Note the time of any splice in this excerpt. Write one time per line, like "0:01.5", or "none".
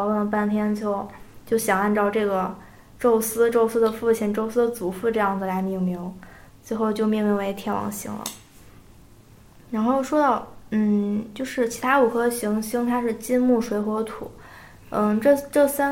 none